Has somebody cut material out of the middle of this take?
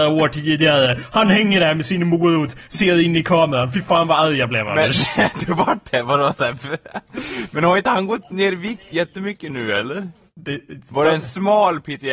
no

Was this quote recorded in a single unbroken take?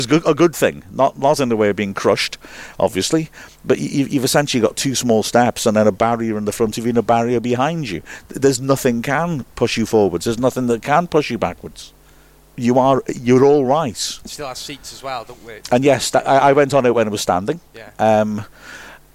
yes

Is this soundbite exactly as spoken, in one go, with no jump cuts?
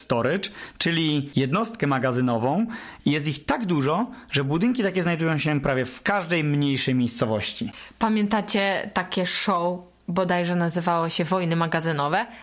yes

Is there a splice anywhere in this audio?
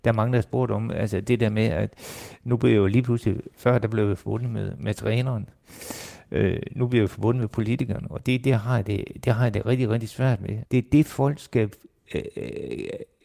yes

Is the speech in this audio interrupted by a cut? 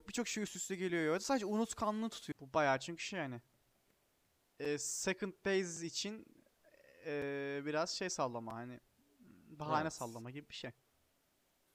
yes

